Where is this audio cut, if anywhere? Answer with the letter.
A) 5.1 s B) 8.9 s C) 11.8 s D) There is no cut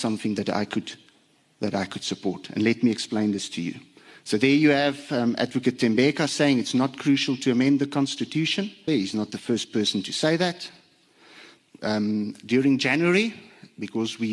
B